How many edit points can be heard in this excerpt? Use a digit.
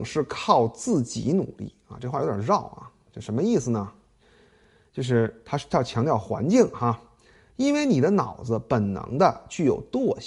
0